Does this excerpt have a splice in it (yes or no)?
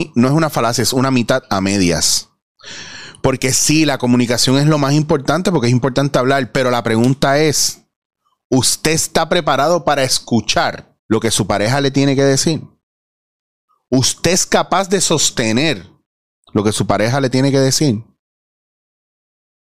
yes